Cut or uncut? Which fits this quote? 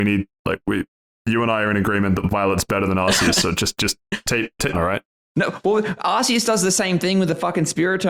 cut